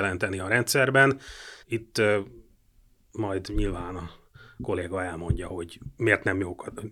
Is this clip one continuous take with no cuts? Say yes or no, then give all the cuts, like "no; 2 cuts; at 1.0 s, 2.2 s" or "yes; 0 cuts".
no; 1 cut; at 1.6 s